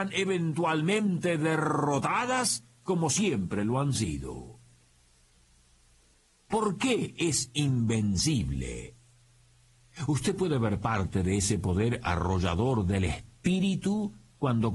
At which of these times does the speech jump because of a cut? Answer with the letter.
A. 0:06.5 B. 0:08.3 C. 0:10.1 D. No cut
A